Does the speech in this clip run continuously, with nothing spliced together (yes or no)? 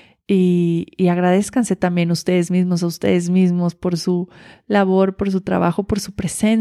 yes